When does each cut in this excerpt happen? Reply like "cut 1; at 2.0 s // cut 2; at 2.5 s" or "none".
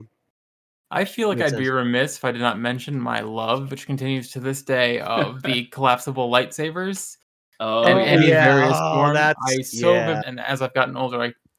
cut 1; at 10.2 s